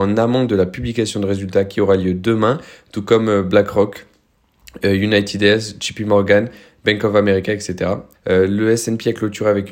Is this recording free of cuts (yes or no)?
no